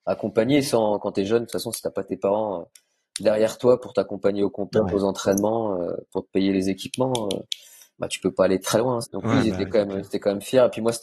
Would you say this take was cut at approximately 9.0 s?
yes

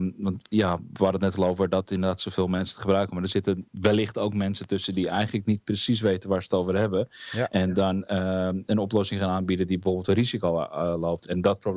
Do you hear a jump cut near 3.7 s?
yes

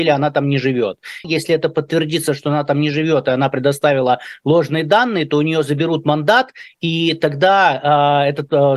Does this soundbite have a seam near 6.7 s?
no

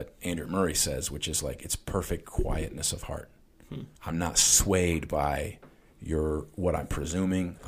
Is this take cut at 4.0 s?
yes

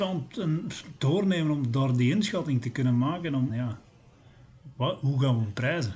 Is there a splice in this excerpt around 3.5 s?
yes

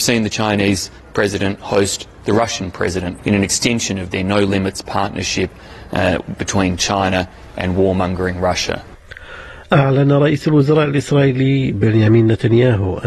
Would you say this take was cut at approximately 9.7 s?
no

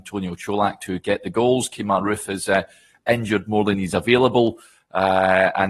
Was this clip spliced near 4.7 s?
no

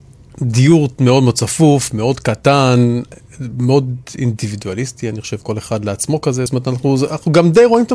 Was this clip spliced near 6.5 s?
no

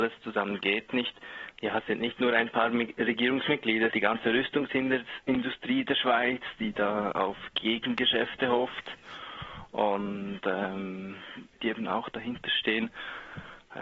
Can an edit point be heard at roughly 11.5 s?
yes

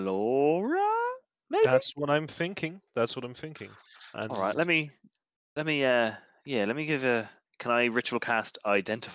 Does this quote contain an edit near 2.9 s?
no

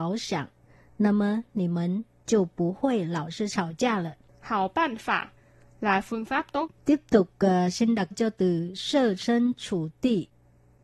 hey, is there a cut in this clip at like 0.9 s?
no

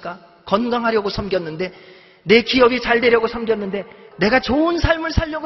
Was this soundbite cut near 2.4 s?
no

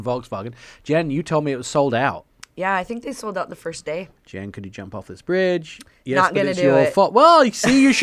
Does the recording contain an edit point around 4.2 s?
yes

